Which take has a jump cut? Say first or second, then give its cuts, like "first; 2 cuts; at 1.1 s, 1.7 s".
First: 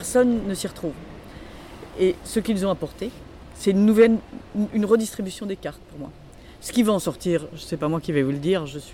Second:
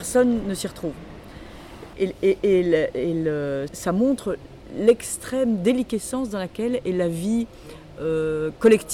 second; 2 cuts; at 1.9 s, 3.7 s